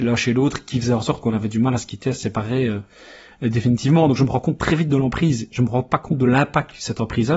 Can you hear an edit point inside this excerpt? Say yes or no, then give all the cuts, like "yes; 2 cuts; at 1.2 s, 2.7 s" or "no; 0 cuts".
no; 0 cuts